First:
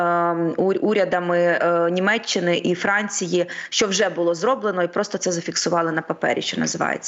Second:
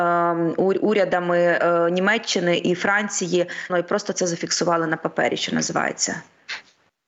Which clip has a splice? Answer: second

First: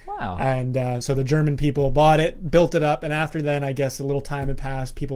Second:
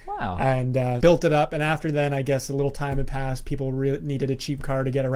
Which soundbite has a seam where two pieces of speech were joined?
second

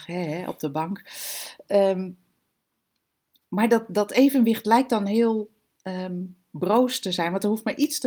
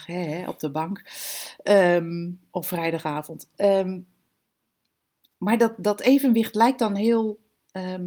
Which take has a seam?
first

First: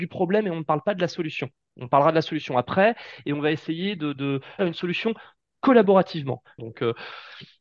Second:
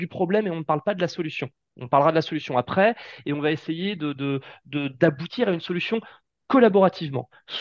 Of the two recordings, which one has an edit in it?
first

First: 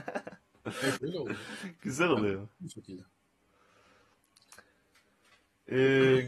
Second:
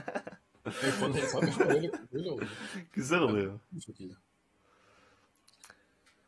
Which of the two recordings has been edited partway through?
first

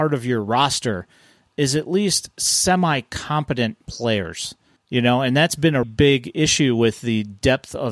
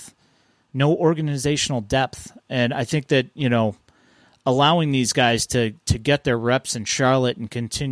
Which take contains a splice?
first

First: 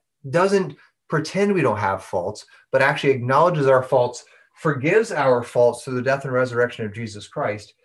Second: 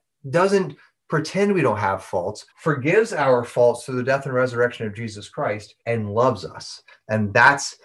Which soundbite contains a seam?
second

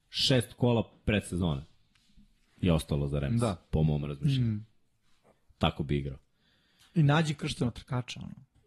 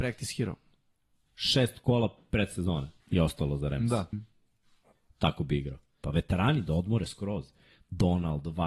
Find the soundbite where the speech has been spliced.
second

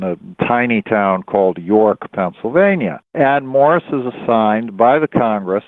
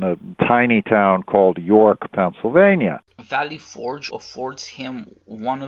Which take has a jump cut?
second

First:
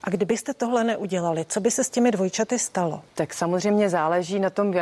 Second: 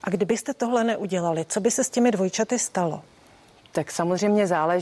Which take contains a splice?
first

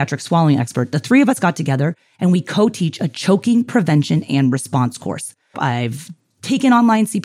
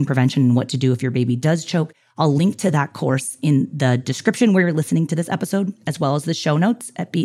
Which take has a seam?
first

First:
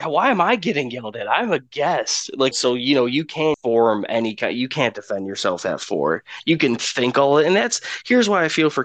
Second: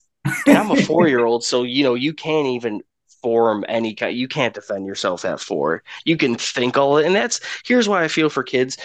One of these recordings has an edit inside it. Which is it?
first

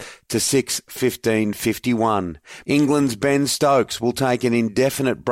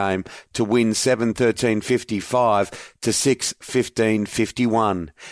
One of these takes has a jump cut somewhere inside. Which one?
first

